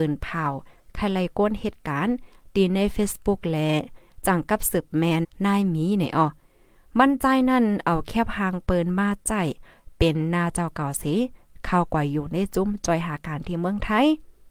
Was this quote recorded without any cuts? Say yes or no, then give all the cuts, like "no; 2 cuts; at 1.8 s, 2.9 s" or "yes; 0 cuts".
no; 1 cut; at 5.2 s